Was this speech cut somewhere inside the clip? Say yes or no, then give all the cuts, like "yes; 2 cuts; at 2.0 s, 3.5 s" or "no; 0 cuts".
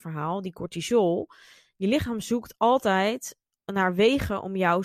no; 0 cuts